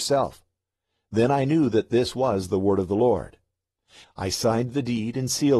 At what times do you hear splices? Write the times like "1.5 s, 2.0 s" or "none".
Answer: 4.0 s